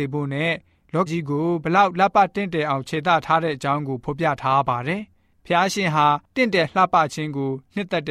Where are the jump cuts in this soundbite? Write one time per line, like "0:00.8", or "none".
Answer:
0:01.1